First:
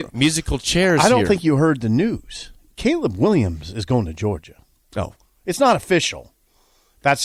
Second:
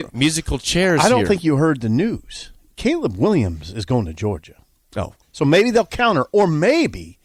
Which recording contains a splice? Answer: second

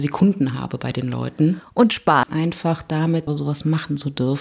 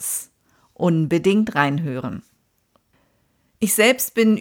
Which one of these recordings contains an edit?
first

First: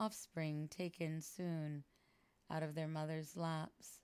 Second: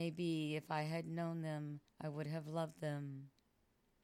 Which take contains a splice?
second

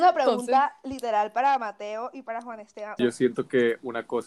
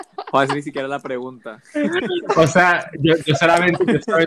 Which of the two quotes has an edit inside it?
first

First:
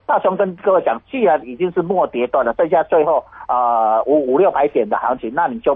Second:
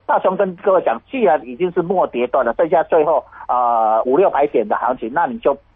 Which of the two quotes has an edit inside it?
second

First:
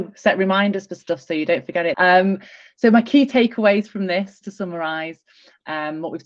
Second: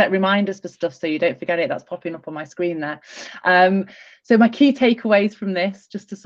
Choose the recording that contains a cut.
first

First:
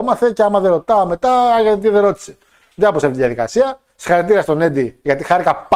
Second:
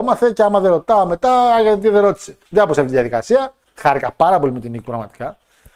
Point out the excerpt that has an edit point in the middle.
second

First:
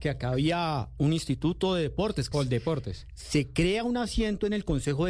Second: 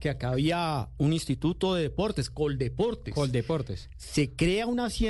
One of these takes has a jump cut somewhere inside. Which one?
first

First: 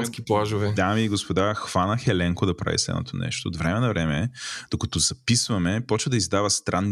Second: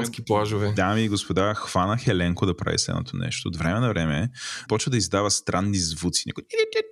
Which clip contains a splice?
second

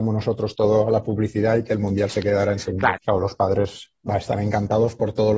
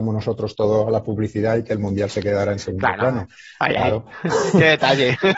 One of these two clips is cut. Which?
first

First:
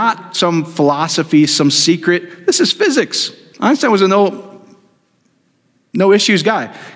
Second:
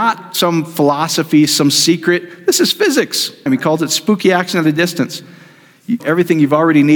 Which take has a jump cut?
second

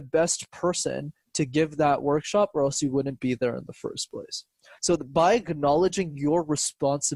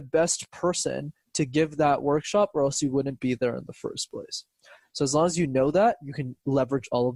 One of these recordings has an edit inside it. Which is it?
second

